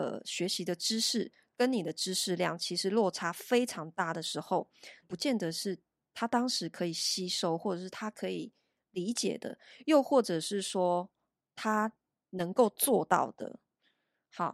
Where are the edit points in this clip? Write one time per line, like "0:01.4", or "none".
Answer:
0:05.0